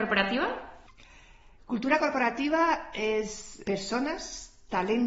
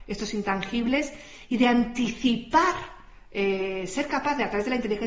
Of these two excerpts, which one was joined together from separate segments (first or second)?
first